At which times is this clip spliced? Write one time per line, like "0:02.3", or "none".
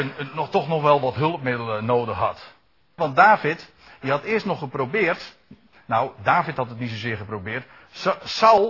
0:03.0